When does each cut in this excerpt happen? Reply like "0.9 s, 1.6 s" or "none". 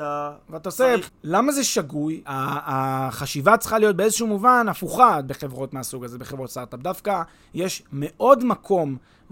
1.1 s, 2.2 s